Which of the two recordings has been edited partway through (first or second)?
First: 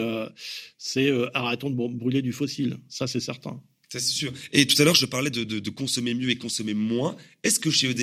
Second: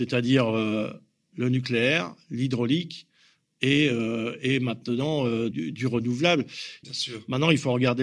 second